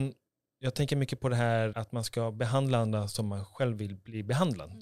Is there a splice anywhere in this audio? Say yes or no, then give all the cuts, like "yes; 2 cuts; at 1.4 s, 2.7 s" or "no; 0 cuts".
yes; 1 cut; at 1.7 s